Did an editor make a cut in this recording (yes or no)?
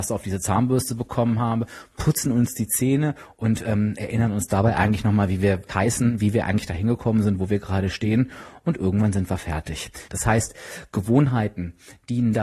yes